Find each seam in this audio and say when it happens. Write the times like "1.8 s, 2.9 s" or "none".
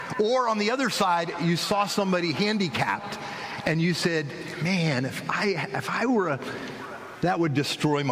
7.2 s